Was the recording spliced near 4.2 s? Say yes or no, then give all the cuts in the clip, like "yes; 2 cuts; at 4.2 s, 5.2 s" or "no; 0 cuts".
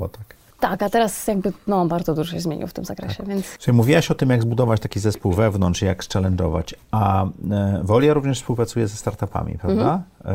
no; 0 cuts